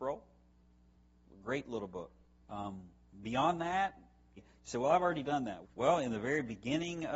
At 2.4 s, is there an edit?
yes; 3 cuts; at 2.4 s, 4.4 s, 5.6 s

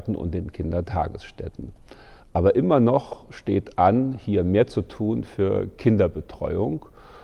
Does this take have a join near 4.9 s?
no; 1 cut; at 2.2 s

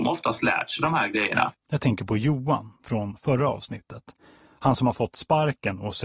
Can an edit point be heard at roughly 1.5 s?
yes; 1 cut; at 1.5 s

